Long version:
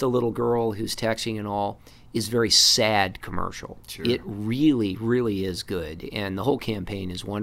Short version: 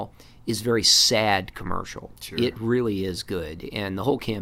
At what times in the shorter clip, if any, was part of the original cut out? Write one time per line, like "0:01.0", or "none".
0:02.6